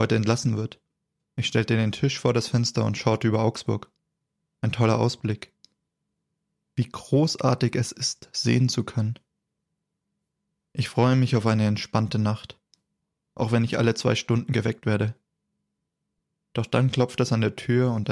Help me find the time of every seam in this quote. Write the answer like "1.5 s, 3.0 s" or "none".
1.2 s